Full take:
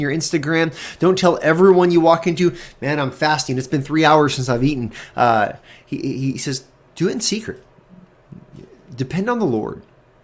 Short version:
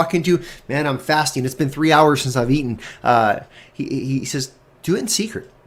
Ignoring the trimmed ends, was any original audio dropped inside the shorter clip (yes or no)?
no